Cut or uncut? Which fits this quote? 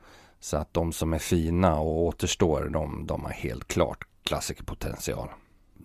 uncut